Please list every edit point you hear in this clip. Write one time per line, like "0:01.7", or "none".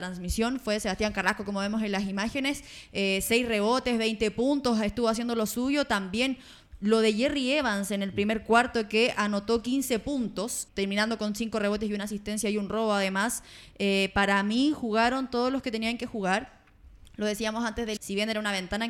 0:10.7
0:18.0